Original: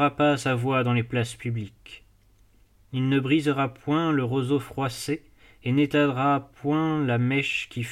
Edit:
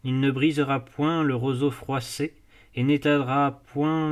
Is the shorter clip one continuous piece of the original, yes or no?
yes